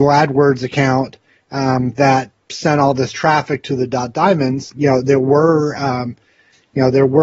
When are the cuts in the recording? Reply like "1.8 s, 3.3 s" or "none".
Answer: 4.7 s